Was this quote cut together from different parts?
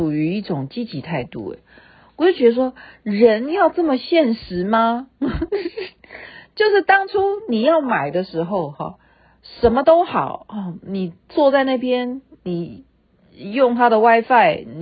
no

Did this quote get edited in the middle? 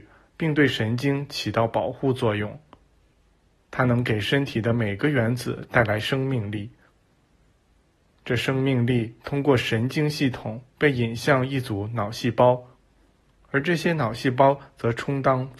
yes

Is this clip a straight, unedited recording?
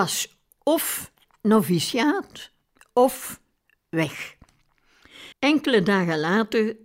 no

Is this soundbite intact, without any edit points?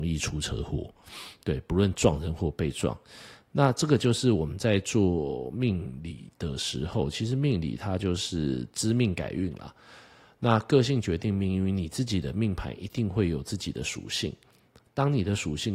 yes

